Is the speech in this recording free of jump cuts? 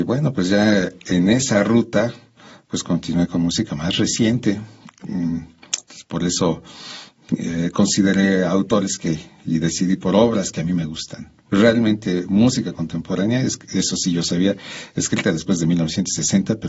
no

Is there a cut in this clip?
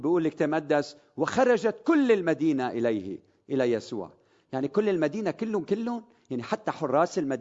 no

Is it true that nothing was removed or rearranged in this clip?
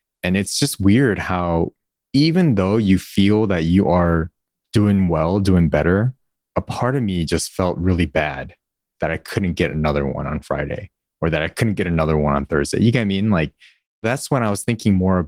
yes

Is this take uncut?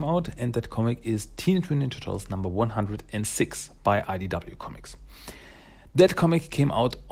yes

